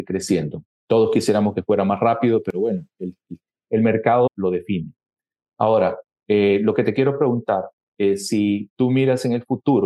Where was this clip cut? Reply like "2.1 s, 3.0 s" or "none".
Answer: 4.3 s